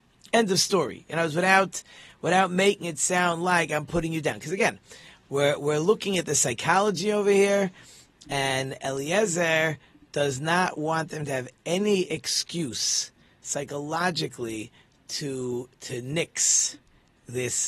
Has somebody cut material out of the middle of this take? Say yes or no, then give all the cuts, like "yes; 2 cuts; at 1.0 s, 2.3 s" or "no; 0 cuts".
no; 0 cuts